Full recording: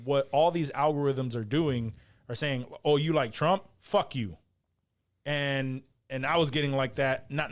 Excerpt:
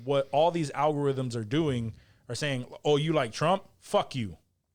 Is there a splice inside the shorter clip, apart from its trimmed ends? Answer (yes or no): no